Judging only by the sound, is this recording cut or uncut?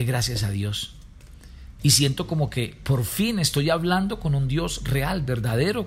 cut